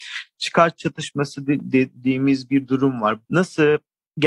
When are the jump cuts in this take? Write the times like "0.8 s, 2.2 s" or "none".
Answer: 3.2 s